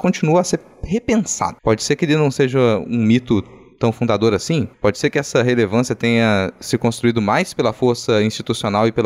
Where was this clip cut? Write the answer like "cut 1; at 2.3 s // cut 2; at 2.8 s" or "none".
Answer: none